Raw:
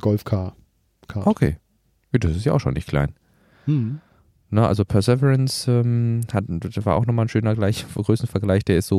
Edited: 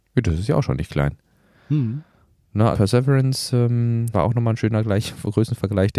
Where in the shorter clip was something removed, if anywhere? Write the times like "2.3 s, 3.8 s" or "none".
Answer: 2.7 s, 4.1 s